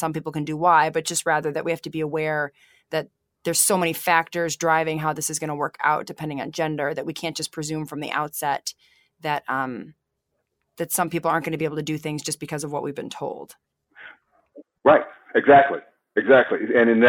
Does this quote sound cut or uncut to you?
uncut